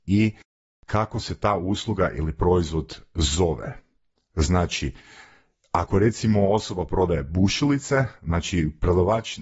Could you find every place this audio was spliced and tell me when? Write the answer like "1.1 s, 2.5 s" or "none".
none